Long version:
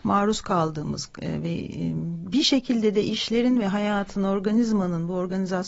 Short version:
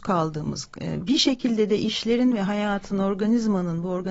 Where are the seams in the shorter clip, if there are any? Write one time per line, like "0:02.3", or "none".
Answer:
0:01.0